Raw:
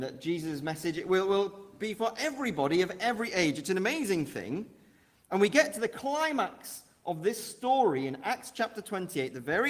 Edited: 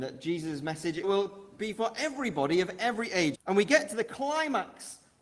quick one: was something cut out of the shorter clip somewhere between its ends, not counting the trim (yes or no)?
yes